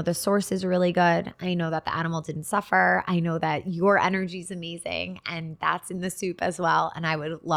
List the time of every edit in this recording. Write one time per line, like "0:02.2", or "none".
none

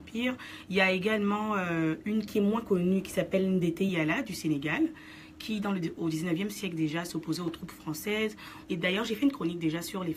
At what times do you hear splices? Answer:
0:08.7

